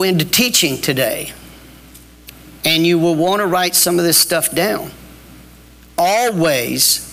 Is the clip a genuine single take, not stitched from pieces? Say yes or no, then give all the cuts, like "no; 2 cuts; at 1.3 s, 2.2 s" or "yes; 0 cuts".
yes; 0 cuts